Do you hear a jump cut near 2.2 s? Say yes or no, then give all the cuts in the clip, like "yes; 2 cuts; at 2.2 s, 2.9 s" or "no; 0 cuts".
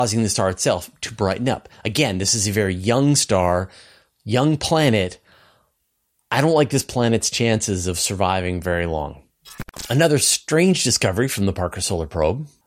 no; 0 cuts